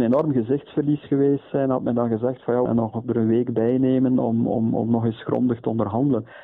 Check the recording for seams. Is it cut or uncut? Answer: cut